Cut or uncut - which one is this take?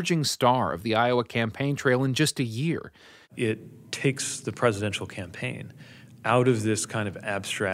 cut